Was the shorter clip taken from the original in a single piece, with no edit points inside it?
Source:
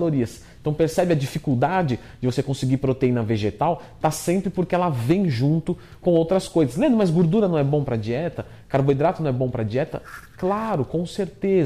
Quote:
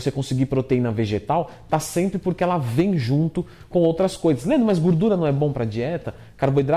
yes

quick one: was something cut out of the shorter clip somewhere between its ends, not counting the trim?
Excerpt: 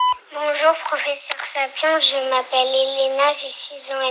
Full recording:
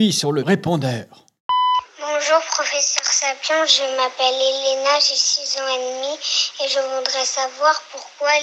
no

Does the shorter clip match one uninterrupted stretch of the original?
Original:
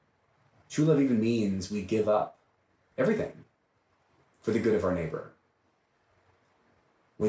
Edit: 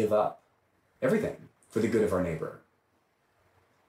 no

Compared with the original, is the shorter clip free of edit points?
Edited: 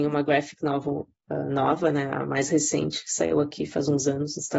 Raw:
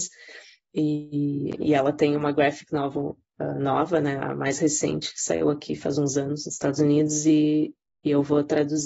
yes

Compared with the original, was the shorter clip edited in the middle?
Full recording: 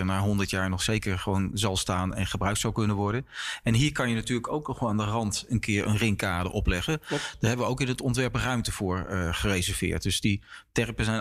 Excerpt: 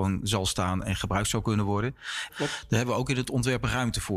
yes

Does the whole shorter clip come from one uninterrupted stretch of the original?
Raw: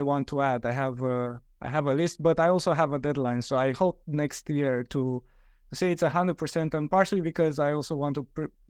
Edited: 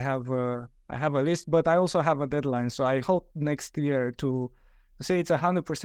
yes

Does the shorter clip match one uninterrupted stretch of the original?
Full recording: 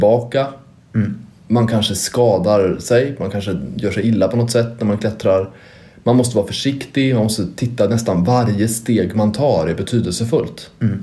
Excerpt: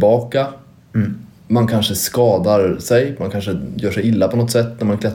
yes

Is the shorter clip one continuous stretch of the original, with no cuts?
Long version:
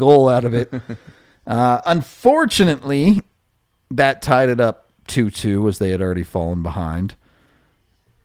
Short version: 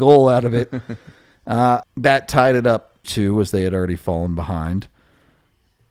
no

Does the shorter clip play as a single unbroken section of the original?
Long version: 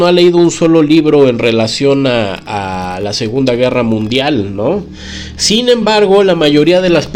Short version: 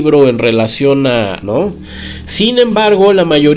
no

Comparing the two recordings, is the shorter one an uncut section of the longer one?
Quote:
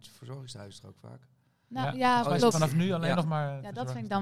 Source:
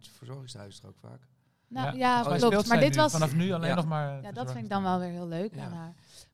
no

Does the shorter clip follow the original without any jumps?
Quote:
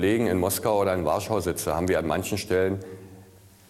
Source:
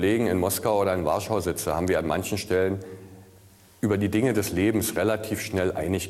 yes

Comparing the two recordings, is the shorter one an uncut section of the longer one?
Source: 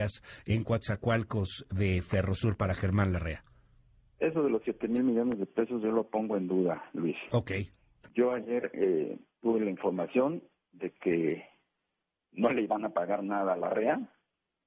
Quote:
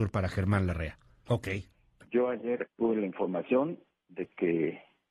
no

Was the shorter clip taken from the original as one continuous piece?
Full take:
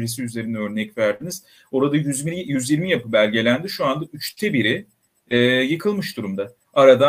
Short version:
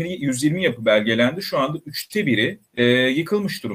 no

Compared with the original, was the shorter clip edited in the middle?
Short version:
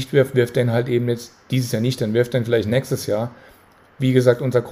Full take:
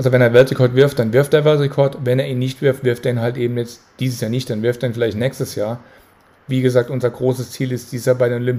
no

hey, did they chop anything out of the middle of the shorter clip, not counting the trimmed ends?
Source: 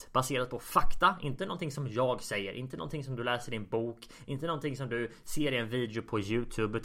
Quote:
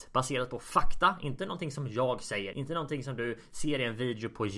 yes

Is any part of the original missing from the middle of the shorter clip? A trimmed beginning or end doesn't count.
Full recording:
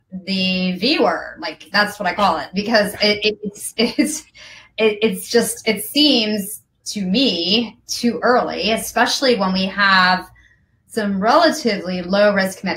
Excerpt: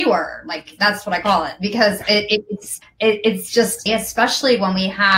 yes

